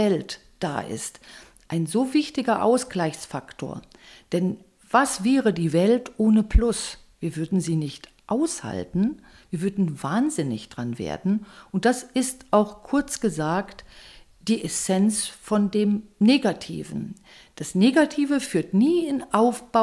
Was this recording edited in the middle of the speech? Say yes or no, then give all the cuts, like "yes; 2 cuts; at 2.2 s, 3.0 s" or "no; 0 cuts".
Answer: no; 0 cuts